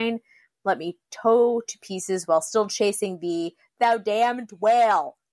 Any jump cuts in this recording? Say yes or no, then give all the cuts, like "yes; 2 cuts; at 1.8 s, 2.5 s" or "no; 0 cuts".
yes; 1 cut; at 3.7 s